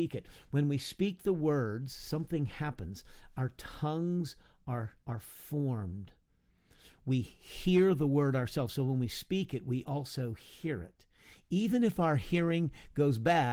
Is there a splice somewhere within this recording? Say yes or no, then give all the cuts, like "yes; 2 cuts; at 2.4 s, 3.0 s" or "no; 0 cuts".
no; 0 cuts